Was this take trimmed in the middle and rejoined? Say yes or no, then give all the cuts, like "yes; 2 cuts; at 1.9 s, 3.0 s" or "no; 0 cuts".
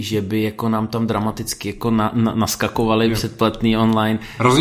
no; 0 cuts